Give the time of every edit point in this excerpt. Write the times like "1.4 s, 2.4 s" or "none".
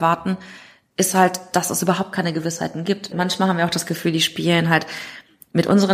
3.1 s